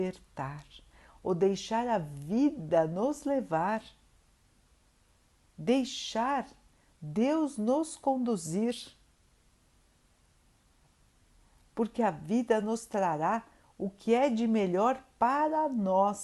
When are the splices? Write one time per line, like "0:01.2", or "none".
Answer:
none